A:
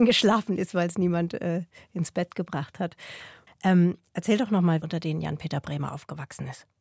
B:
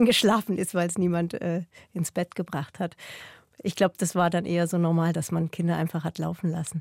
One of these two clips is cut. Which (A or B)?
A